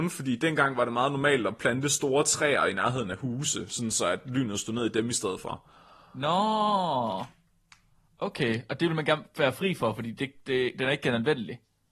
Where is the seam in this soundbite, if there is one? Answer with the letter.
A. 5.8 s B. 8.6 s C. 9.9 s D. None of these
D